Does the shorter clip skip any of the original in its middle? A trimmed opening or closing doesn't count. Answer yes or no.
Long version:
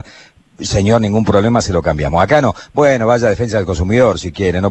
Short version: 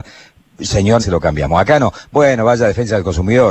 yes